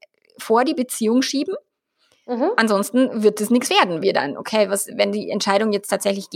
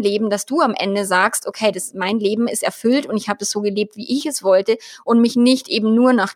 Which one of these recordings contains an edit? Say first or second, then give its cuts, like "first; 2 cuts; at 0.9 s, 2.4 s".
first; 1 cut; at 4.0 s